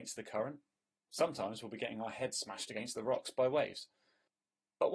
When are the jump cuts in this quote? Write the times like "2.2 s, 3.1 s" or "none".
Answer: none